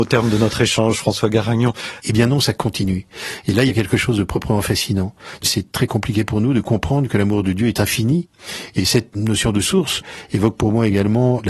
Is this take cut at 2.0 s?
yes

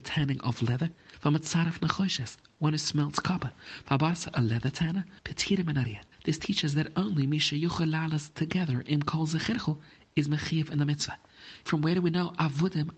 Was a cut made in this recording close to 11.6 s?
yes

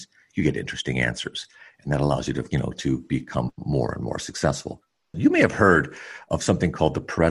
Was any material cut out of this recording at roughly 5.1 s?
yes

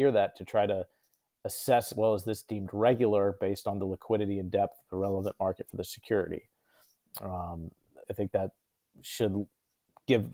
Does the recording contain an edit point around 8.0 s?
yes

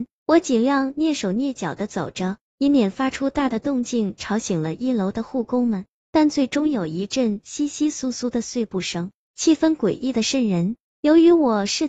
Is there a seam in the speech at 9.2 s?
yes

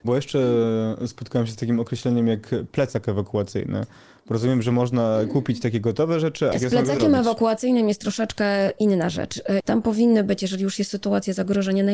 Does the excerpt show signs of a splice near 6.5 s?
yes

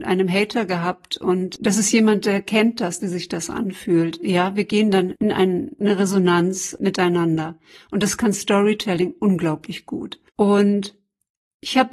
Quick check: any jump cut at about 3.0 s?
yes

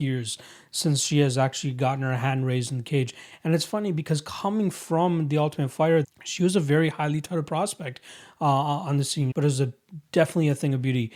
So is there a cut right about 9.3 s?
yes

